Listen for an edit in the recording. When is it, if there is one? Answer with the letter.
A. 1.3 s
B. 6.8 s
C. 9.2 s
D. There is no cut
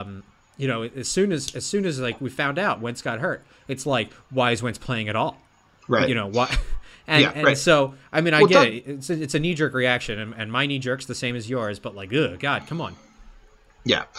D